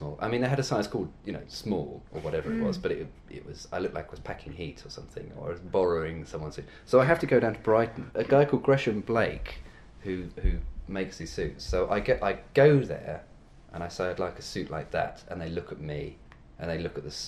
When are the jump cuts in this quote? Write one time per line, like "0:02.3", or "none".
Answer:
none